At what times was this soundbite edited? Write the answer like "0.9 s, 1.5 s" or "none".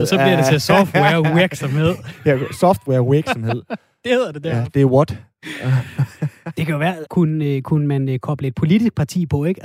7.1 s